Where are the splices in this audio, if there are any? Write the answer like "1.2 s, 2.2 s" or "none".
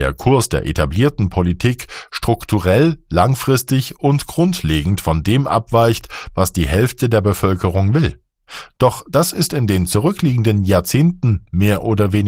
none